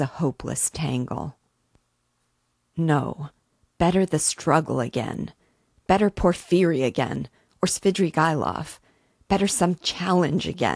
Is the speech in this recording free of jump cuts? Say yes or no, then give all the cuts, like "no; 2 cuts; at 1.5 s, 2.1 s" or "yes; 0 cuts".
yes; 0 cuts